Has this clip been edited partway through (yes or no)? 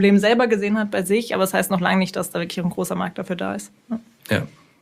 no